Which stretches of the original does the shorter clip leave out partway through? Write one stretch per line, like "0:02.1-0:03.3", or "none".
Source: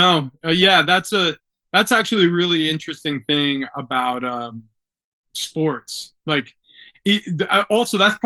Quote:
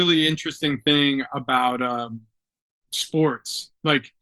none